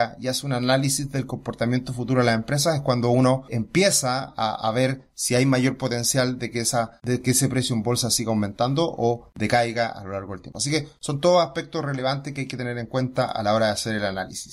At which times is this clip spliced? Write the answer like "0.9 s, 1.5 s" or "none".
none

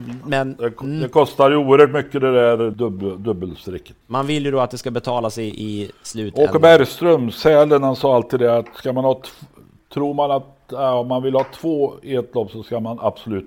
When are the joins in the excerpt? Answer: 2.7 s, 4.0 s

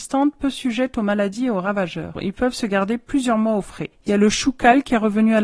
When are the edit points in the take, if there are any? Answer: 2.1 s, 3.9 s

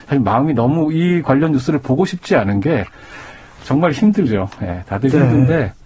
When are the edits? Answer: none

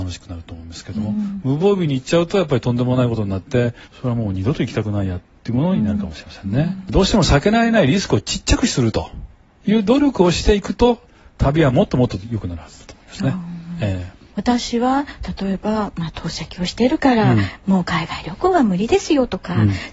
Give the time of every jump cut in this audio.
3.8 s

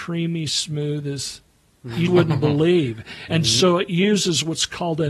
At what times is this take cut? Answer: 2.1 s, 3.3 s

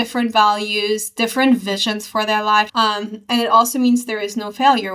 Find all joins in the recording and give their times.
2.7 s

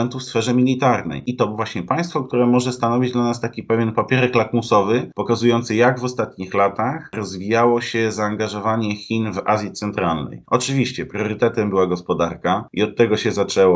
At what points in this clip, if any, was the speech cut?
none

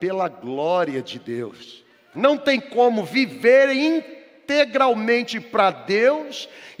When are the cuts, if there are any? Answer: 2.1 s

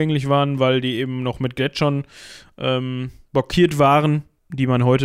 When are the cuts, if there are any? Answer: 3.3 s

